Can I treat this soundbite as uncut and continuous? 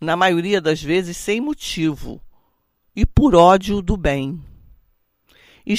yes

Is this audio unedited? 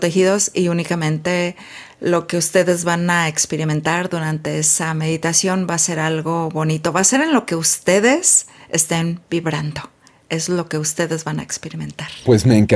yes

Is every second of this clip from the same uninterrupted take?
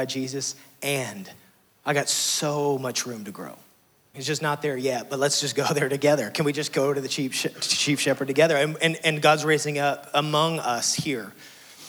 no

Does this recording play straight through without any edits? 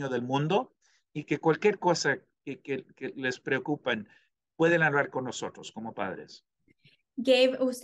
yes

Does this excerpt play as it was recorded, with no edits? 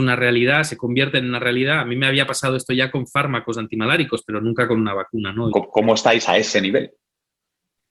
no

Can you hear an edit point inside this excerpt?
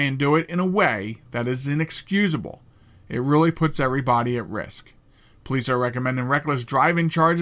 no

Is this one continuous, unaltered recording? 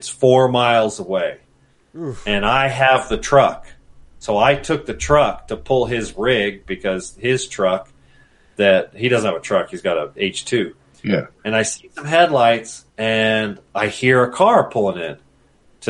no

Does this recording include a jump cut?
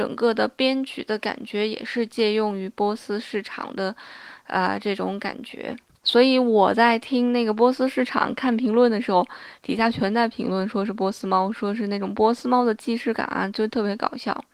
no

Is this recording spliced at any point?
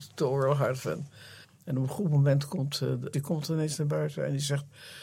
yes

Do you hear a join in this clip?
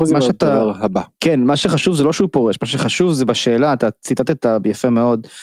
yes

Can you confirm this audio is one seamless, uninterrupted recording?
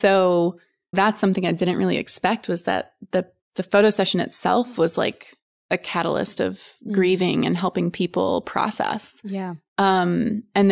no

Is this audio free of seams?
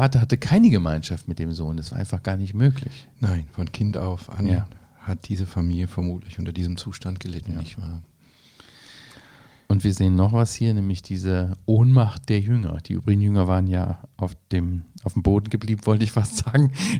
yes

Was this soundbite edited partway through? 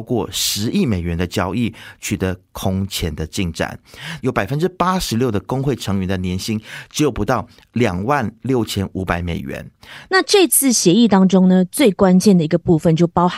yes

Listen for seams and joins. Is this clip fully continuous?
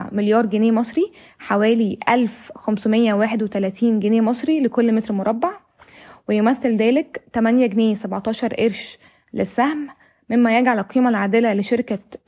yes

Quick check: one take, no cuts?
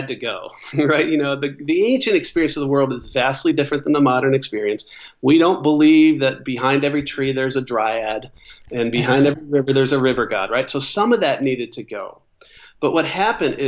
yes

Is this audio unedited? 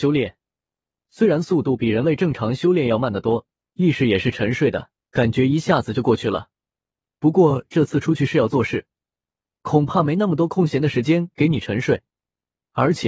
no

